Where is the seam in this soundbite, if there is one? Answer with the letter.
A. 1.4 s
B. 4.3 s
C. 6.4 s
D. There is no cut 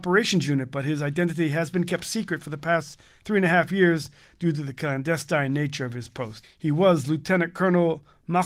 C